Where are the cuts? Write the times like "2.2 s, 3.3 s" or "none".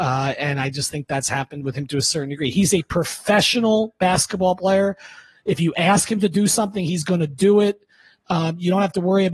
none